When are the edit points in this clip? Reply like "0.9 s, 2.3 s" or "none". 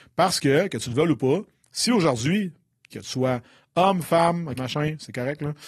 2.9 s, 4.6 s